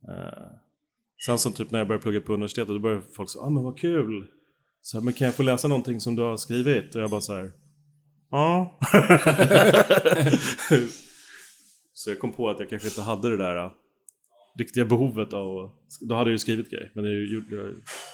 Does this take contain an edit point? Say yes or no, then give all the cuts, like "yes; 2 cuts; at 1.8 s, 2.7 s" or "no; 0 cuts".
no; 0 cuts